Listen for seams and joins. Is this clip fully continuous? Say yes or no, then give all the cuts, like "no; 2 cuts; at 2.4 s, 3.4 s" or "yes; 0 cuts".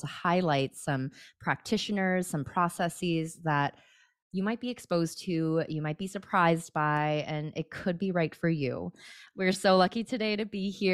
yes; 0 cuts